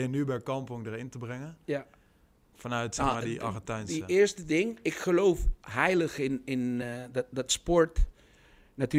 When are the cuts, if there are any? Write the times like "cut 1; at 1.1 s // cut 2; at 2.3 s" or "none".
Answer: none

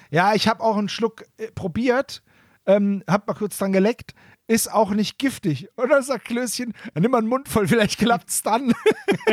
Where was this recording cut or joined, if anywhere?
none

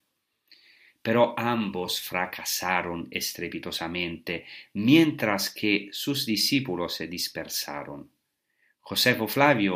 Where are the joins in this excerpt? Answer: none

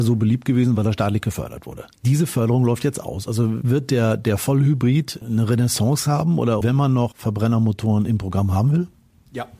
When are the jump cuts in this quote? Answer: cut 1; at 6.6 s

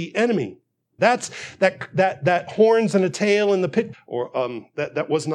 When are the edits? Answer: cut 1; at 1.0 s // cut 2; at 3.9 s

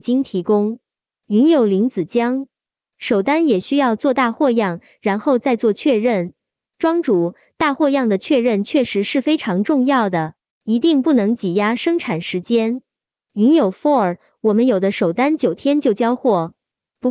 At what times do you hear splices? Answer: none

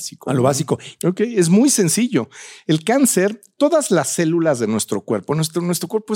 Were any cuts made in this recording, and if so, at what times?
cut 1; at 1.0 s

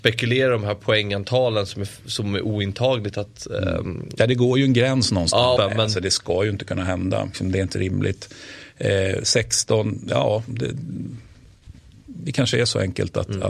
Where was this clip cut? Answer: cut 1; at 5.6 s // cut 2; at 7.3 s

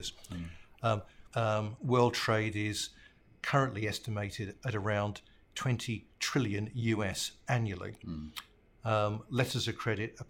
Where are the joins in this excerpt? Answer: cut 1; at 1.3 s

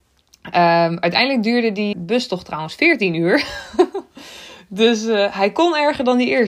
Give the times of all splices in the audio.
cut 1; at 1.9 s

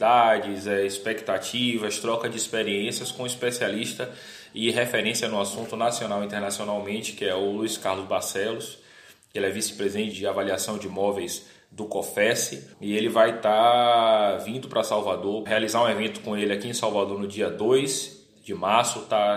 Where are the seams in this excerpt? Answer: cut 1; at 10.1 s // cut 2; at 12.7 s // cut 3; at 15.5 s

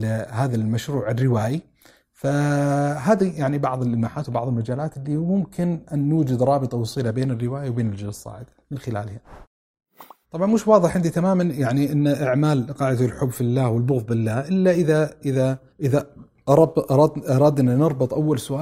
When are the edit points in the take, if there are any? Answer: cut 1; at 10.2 s // cut 2; at 15.7 s

